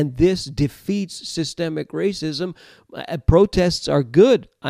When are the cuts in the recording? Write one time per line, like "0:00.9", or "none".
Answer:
none